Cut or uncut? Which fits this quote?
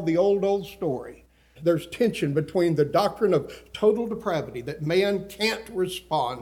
cut